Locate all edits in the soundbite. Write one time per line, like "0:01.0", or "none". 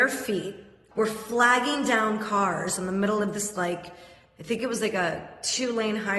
0:00.9